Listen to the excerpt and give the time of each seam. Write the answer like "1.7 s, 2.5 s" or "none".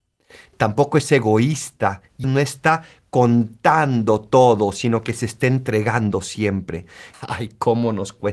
2.2 s, 7.1 s